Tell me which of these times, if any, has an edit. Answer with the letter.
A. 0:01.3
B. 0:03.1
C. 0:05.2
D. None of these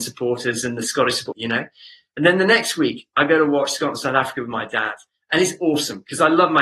A